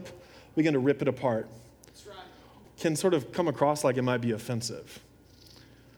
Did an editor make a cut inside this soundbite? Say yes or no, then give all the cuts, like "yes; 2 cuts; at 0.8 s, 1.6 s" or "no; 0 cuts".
yes; 1 cut; at 2.6 s